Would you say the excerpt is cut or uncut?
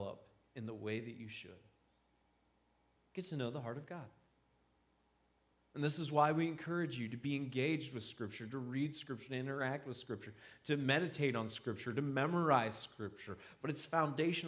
cut